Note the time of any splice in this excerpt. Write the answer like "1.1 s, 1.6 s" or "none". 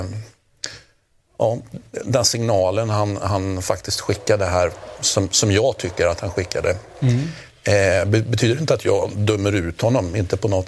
none